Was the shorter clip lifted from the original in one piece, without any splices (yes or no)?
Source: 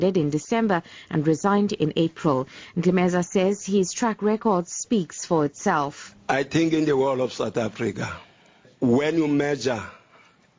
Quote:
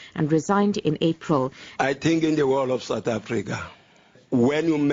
no